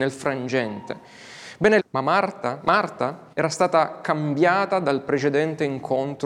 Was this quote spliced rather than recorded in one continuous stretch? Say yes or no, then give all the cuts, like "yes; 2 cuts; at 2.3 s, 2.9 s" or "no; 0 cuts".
yes; 2 cuts; at 1.8 s, 3.3 s